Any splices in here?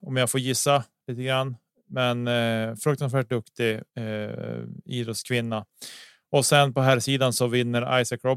yes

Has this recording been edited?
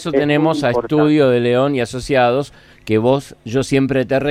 no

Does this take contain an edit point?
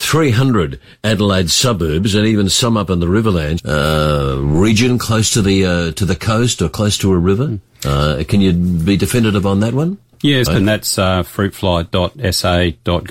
yes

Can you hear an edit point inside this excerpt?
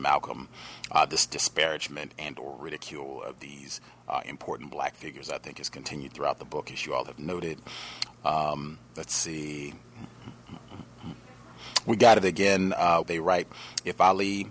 yes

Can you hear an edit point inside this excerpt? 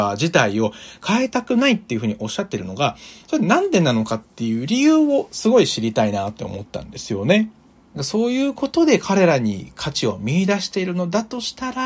yes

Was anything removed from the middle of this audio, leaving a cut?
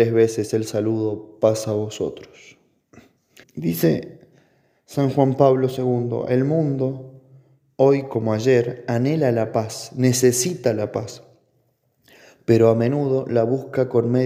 yes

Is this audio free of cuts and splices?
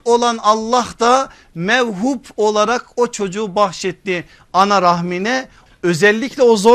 no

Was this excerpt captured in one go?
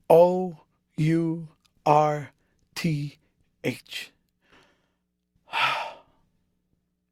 yes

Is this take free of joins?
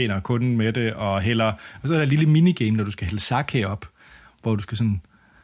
yes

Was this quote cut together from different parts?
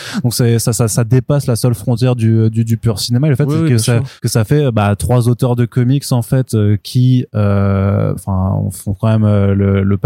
yes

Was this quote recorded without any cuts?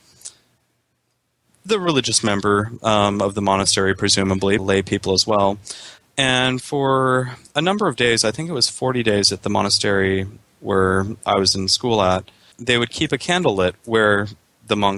no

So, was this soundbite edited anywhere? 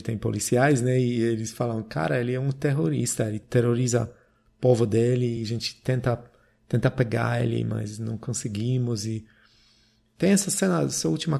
no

